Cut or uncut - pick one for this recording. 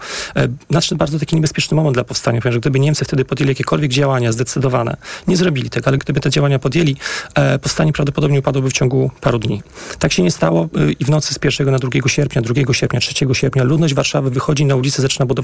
cut